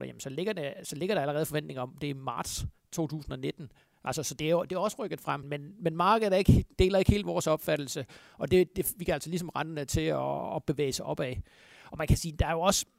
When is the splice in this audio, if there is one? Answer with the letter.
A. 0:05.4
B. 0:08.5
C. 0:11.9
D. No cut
A